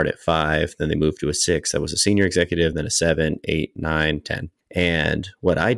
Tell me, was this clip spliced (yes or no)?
no